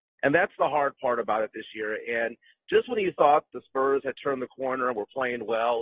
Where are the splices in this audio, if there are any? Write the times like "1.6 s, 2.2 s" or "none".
none

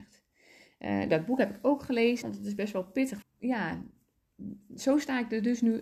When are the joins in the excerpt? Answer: 1.1 s, 2.2 s, 3.2 s

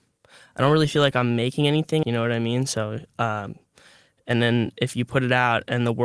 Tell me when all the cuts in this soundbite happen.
2.0 s

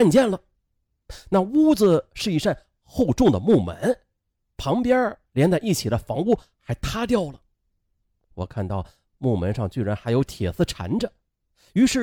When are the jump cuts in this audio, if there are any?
4.4 s

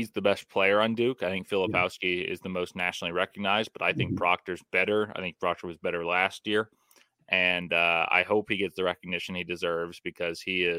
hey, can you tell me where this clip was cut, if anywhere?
none

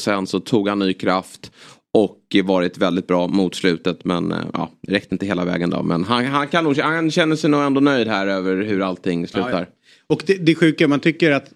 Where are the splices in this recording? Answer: none

